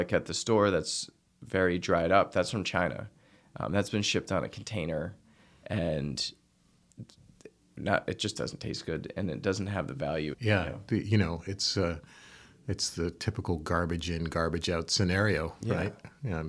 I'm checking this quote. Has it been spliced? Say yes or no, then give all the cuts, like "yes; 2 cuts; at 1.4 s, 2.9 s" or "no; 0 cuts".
yes; 1 cut; at 10.3 s